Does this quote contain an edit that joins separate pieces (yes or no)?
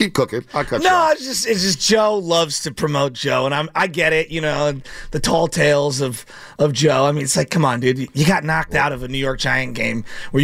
no